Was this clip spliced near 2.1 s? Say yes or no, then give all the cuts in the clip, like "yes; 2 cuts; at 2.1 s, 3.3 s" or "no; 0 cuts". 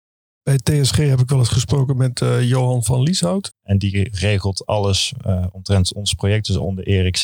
no; 1 cut; at 3.5 s